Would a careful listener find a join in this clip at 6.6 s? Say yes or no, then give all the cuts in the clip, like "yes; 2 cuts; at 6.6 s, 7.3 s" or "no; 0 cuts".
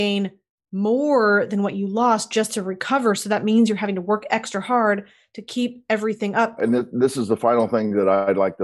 yes; 1 cut; at 6.6 s